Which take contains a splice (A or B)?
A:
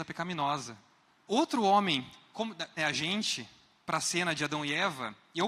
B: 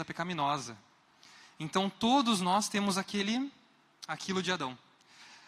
A